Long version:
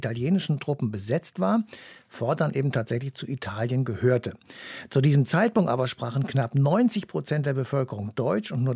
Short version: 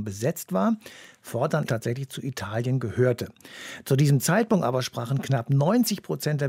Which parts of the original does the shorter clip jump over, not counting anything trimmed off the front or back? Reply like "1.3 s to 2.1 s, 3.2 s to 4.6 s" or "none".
2.5 s to 2.7 s